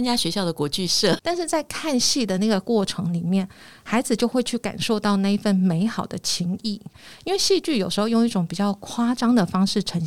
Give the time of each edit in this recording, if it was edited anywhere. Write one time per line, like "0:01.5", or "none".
0:01.2